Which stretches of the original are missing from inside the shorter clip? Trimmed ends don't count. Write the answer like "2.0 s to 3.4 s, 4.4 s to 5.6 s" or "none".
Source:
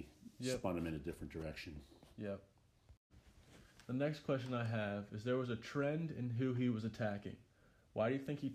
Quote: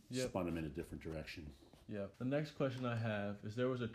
2.4 s to 3.8 s